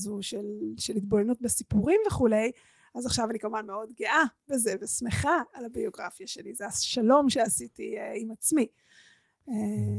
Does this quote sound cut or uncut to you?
uncut